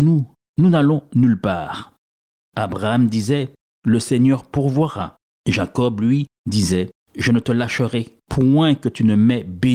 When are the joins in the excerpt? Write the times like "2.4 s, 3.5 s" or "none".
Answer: none